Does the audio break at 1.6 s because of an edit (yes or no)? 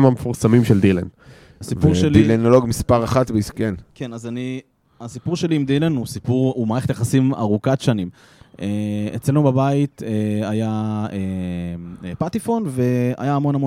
yes